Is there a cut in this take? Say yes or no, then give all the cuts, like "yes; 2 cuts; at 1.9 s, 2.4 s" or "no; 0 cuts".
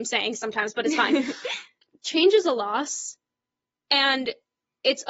no; 0 cuts